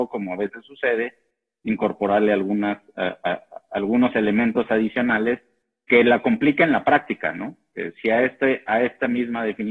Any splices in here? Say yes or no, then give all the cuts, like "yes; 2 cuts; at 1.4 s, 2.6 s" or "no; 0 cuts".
no; 0 cuts